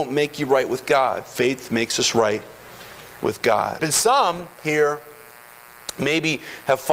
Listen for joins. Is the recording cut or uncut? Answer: cut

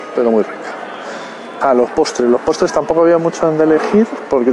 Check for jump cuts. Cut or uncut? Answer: cut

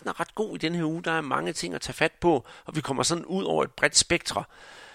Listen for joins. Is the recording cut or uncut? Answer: uncut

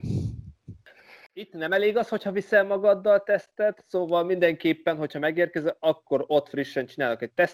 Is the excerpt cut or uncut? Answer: uncut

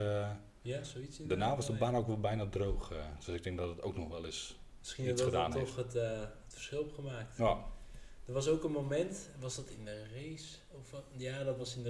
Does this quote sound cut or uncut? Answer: uncut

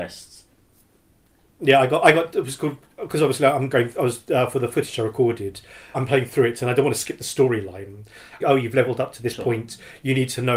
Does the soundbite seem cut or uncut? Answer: cut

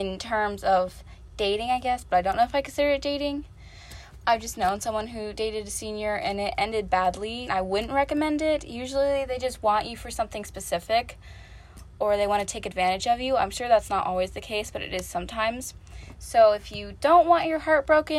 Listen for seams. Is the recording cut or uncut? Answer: cut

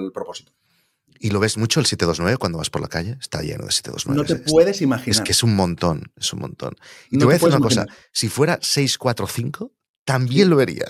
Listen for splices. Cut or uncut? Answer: uncut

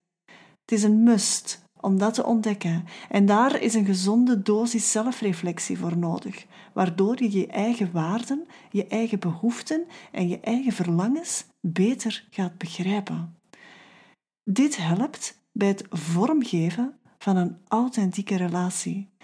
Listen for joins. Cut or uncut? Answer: uncut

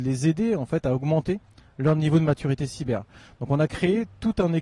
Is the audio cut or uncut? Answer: uncut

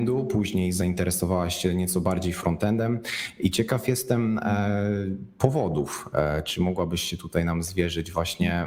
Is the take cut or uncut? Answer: uncut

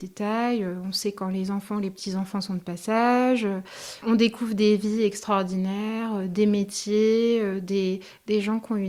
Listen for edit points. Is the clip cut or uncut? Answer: cut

